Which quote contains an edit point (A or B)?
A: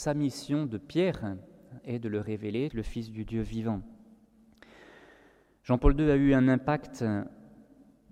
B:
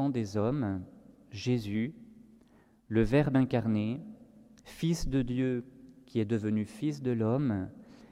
A